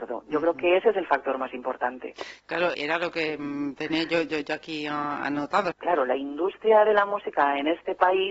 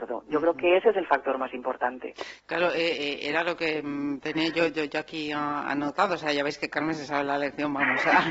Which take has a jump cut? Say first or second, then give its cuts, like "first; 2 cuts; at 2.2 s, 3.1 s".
first; 2 cuts; at 2.7 s, 5.7 s